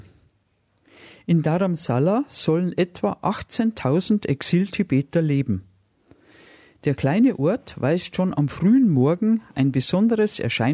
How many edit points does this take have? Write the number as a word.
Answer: zero